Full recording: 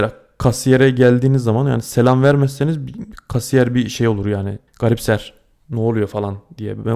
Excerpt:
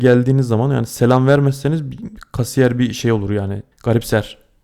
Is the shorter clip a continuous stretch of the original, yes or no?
yes